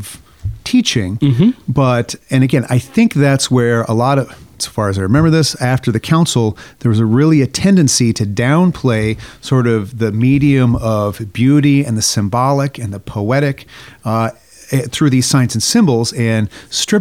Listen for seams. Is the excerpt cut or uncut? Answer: uncut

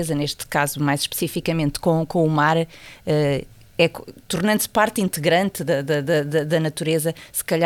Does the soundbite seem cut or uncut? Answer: uncut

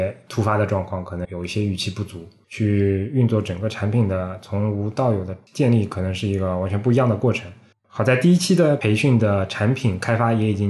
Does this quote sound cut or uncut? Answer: cut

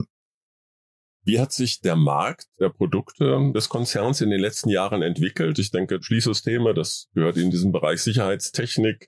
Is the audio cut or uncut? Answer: uncut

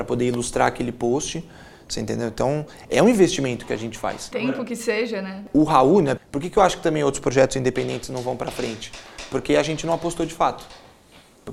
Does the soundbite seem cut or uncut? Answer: cut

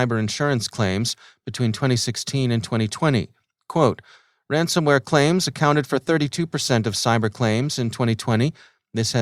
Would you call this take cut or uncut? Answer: uncut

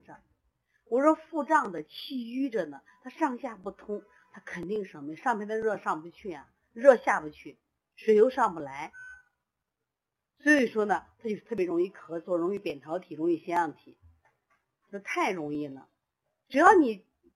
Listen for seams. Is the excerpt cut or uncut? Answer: uncut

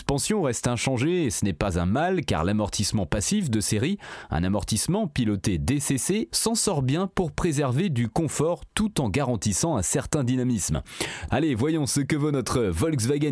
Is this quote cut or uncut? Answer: cut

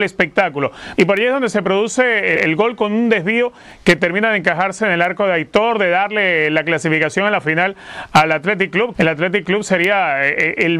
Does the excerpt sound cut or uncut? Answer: cut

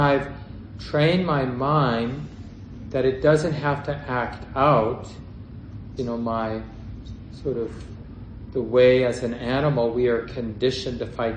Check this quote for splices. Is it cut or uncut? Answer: cut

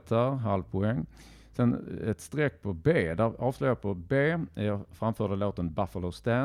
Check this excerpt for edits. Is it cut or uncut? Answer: uncut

